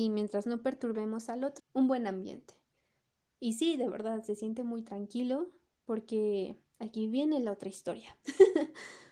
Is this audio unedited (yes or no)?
no